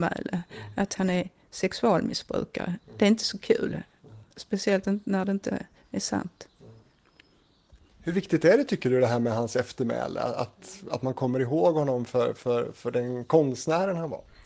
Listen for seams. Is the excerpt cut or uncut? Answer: uncut